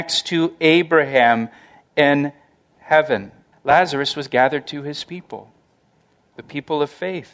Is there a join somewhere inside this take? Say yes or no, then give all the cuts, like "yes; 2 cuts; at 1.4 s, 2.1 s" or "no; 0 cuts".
yes; 1 cut; at 3.5 s